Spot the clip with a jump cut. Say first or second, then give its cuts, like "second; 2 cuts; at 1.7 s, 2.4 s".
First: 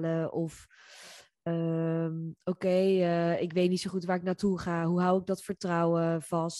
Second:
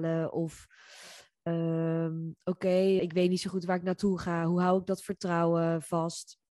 second; 1 cut; at 3.0 s